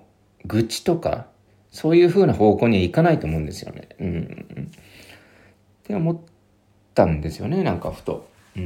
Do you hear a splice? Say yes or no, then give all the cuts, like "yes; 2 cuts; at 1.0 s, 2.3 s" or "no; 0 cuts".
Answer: no; 0 cuts